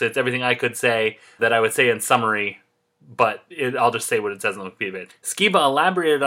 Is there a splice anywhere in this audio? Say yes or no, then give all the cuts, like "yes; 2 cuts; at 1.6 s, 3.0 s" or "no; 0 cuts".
yes; 2 cuts; at 1.4 s, 5.1 s